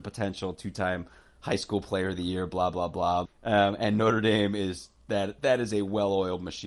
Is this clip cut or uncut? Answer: cut